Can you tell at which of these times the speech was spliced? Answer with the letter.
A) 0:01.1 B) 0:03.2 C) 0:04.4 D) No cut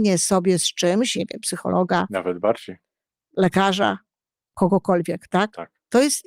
A